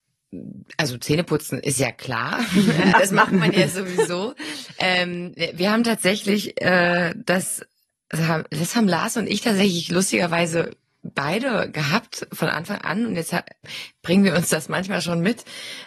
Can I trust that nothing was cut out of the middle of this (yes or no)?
no